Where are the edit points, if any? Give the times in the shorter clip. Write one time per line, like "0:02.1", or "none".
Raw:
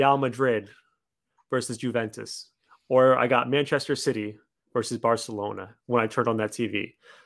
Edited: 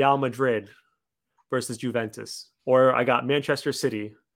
0:02.6